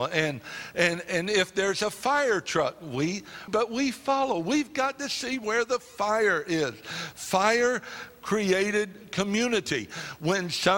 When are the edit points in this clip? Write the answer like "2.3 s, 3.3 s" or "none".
3.5 s